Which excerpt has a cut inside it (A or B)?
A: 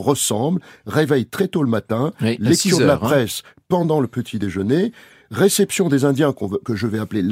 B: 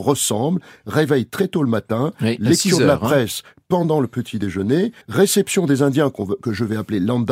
B